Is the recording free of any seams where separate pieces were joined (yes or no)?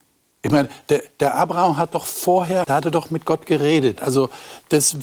no